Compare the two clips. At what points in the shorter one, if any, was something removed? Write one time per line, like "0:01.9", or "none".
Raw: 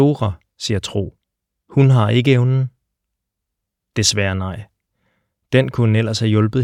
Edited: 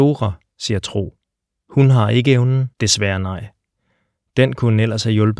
0:02.7